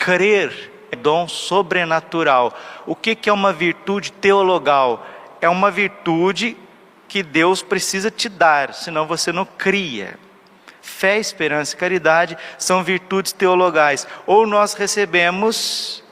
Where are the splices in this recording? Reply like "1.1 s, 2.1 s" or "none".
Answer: 0.9 s